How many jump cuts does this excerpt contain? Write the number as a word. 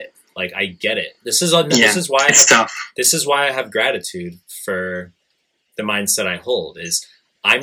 zero